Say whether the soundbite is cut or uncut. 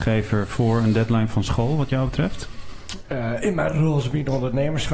uncut